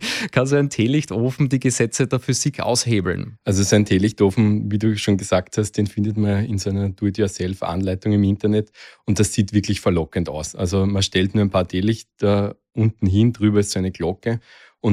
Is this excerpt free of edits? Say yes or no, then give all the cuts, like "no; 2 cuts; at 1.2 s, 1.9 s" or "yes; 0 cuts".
no; 1 cut; at 2.6 s